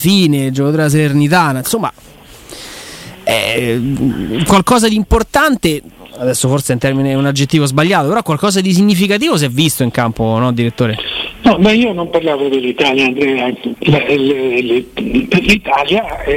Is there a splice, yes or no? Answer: yes